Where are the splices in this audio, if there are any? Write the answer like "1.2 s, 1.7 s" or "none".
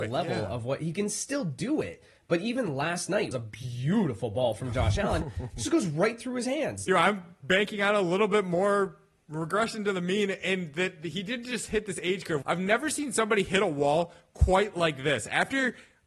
3.3 s, 6.9 s, 12.4 s